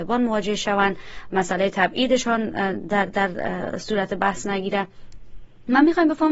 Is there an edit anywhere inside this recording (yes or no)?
no